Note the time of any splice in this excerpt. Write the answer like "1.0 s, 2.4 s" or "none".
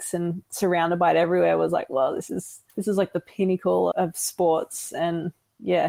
2.7 s, 3.9 s